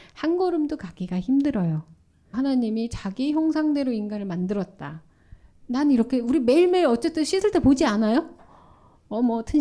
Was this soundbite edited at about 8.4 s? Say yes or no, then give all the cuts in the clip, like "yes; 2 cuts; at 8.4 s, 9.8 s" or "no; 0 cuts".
no; 2 cuts; at 2.3 s, 5.5 s